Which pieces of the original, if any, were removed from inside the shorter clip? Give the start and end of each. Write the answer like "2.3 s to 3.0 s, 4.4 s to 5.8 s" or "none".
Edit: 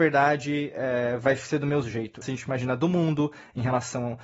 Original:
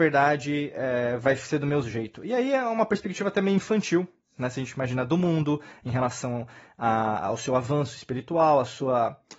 2.2 s to 4.5 s